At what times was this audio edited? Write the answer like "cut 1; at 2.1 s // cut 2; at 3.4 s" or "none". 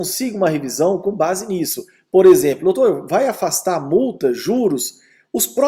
none

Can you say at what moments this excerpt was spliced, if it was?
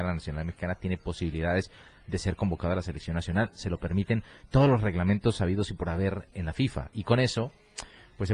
none

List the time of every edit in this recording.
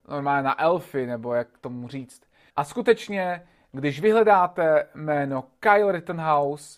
cut 1; at 2.5 s

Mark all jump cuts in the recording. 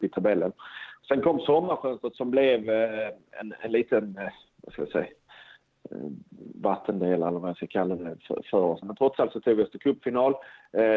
cut 1; at 2.1 s // cut 2; at 8.8 s

